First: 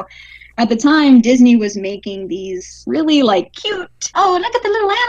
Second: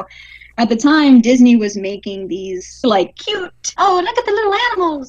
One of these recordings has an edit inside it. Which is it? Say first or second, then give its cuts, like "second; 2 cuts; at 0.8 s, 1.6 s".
second; 1 cut; at 2.8 s